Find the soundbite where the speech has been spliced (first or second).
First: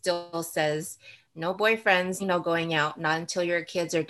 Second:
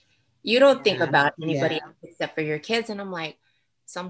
first